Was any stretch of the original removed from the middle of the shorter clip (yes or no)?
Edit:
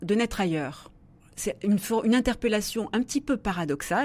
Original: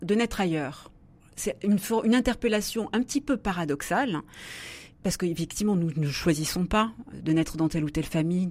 no